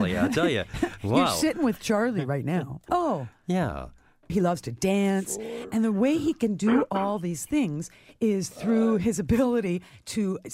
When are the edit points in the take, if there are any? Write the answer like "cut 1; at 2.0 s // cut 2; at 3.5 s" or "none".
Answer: cut 1; at 2.9 s // cut 2; at 4.3 s